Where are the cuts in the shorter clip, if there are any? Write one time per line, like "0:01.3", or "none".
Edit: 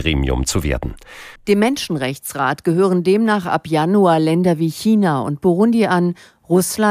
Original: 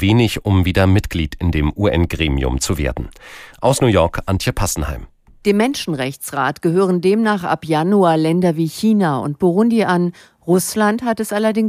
0:01.4